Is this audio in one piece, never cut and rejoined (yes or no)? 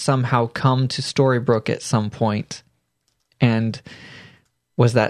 yes